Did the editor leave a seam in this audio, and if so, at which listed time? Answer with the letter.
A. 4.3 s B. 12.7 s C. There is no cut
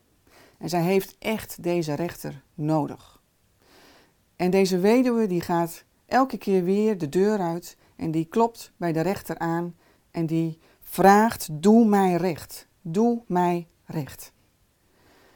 C